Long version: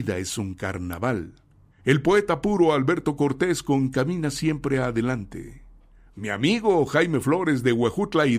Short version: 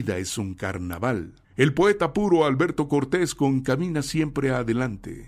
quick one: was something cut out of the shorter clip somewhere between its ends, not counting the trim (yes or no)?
yes